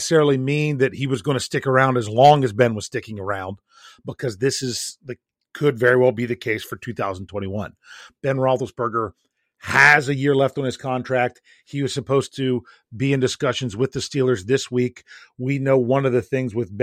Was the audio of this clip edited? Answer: no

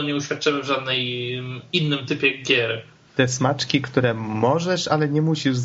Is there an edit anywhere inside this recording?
yes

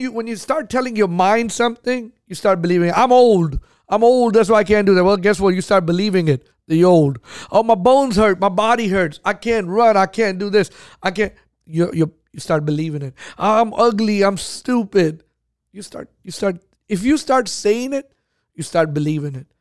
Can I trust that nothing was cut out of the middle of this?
yes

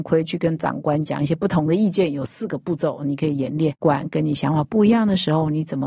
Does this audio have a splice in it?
yes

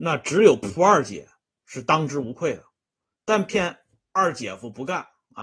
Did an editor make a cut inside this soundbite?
yes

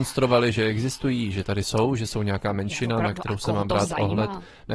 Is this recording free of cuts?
yes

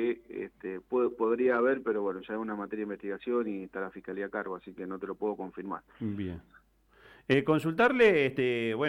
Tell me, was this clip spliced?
no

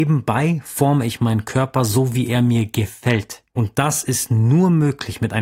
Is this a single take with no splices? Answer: no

